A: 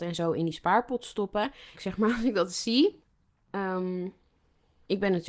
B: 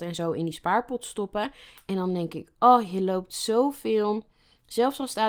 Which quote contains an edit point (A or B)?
A